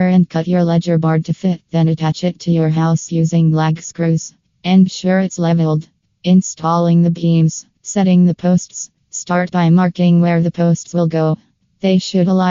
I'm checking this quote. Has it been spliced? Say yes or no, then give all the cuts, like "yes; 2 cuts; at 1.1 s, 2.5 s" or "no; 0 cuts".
yes; 1 cut; at 7.8 s